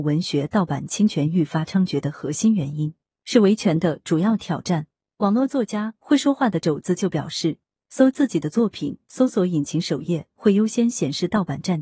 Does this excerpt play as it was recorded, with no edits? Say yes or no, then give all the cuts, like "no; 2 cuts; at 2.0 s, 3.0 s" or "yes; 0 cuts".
no; 1 cut; at 3.1 s